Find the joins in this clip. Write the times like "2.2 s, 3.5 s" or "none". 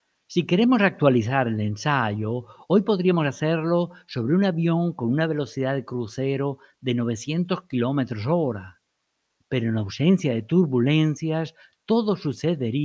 none